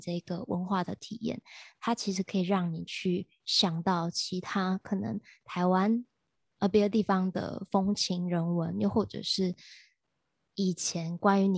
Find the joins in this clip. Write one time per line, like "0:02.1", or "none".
none